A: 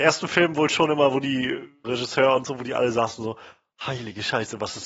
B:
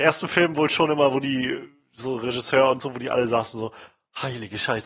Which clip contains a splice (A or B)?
A